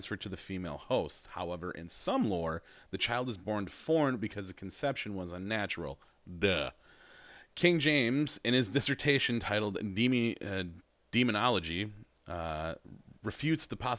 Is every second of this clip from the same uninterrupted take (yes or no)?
yes